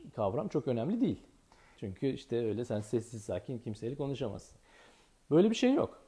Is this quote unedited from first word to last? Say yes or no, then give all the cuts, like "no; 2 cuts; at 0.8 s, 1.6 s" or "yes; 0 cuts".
no; 1 cut; at 1.7 s